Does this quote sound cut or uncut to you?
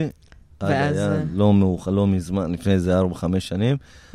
uncut